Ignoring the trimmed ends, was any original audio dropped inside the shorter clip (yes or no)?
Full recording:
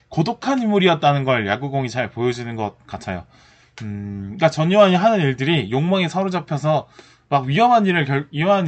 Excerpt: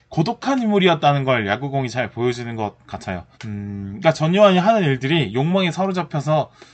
yes